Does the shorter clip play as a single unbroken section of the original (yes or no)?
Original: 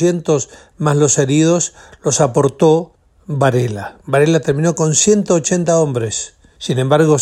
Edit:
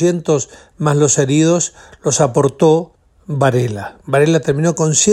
yes